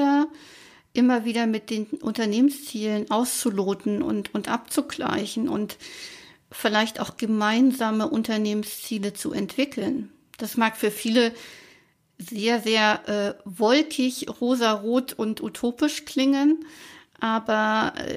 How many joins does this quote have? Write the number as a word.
zero